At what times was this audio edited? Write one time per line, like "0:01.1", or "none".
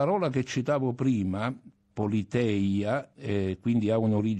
0:01.9
0:03.1